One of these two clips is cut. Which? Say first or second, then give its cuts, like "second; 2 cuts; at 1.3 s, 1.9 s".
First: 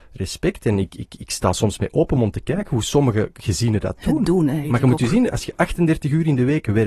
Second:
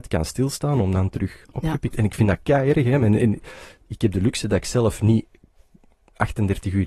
first; 1 cut; at 4.6 s